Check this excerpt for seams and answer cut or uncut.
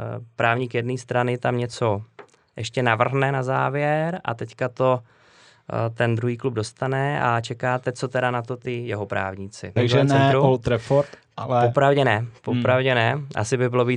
cut